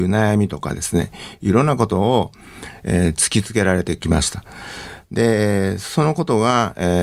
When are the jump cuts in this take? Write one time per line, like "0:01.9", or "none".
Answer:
none